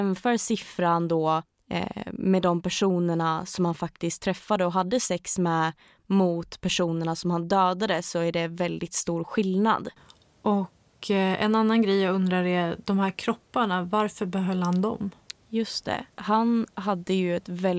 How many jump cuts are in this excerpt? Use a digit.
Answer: 1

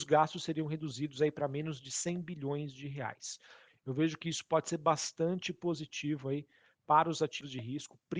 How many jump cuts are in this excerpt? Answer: 1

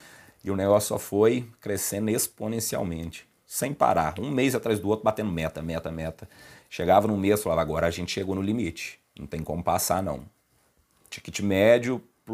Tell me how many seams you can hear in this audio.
2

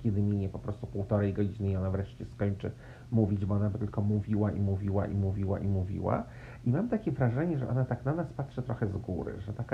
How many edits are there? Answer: 0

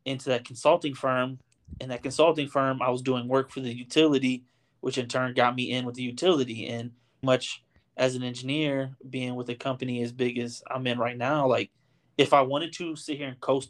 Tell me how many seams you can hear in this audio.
1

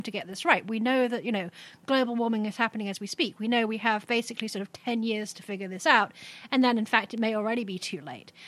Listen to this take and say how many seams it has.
0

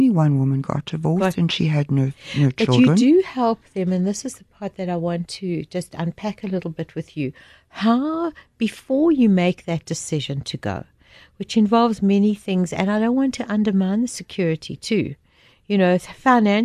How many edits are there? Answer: 0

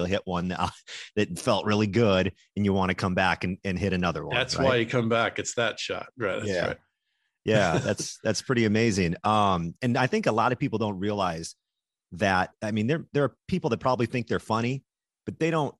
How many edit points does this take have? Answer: 0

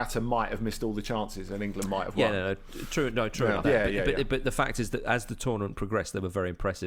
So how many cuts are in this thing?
1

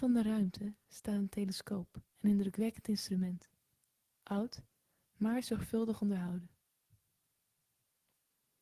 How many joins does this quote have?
1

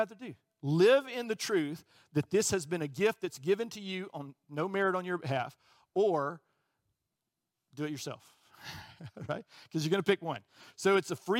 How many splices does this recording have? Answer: 0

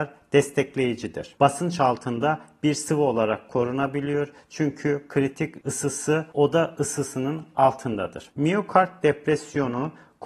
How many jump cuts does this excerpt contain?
2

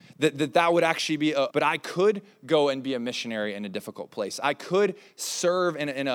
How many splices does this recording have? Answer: 1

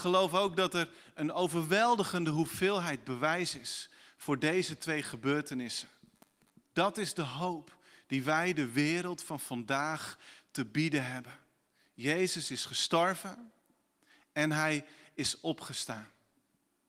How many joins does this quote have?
1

